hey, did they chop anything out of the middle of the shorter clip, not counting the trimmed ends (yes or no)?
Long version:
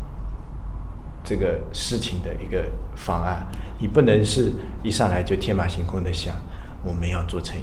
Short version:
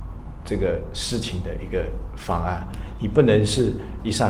no